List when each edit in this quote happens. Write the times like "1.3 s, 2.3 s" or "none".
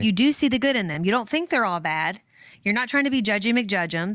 none